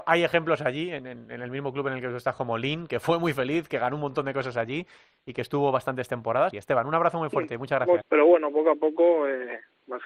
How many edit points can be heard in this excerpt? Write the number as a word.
two